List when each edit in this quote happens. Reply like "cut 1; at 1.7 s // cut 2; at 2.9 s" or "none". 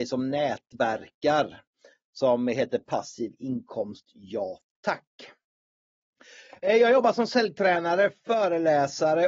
none